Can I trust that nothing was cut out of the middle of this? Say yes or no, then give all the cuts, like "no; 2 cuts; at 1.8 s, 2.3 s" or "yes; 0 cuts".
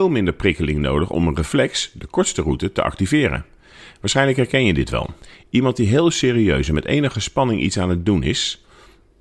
yes; 0 cuts